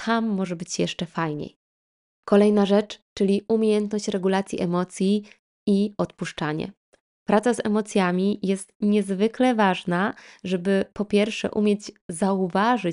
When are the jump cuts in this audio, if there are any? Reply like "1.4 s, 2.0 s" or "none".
none